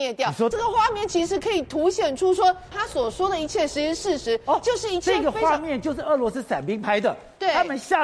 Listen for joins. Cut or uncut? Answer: cut